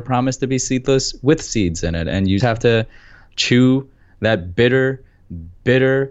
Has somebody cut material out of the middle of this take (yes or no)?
yes